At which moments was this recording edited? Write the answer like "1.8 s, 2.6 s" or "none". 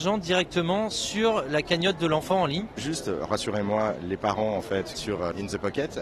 2.7 s